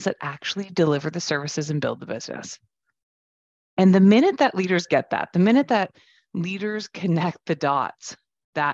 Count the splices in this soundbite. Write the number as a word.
zero